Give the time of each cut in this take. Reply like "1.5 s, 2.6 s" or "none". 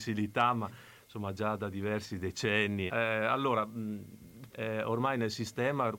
2.9 s, 4.5 s